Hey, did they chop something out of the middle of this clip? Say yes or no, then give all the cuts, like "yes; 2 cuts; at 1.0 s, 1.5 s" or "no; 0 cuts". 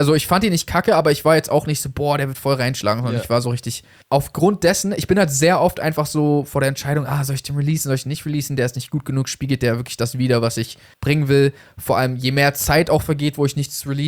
no; 0 cuts